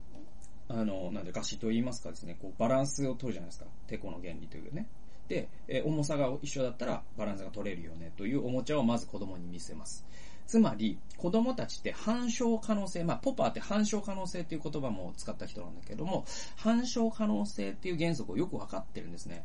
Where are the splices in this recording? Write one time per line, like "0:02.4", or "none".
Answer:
0:01.3
0:07.2
0:10.5